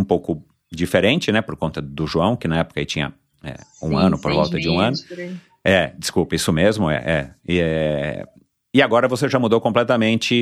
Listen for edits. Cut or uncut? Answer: uncut